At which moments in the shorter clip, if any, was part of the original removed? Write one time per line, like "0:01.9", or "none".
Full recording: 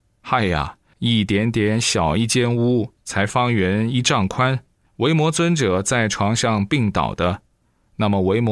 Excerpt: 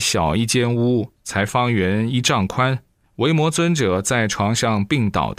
none